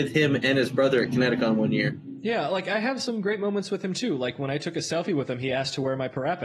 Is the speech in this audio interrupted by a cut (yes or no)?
no